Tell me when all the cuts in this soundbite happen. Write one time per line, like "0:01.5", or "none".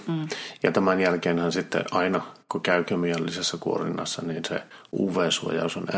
none